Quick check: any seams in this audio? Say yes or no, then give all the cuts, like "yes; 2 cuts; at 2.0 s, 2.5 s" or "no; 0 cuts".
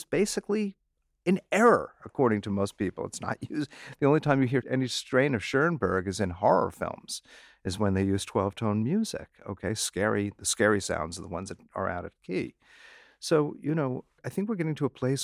no; 0 cuts